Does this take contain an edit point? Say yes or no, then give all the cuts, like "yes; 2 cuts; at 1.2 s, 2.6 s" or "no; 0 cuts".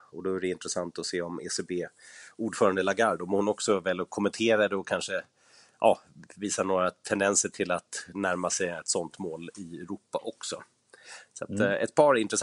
no; 0 cuts